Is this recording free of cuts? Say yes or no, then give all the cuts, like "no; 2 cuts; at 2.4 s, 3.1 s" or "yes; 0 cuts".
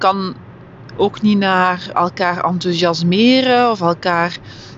no; 2 cuts; at 0.9 s, 1.9 s